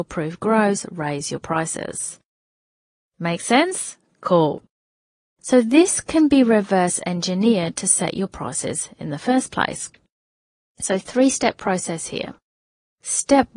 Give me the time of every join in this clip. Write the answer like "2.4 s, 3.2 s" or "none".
none